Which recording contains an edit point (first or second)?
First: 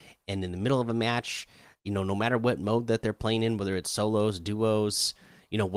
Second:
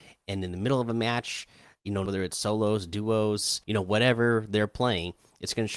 second